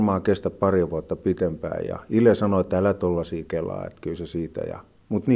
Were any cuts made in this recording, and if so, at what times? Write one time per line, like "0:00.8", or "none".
none